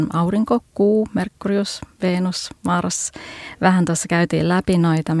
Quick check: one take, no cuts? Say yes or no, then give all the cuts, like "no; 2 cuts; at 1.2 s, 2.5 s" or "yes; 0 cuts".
yes; 0 cuts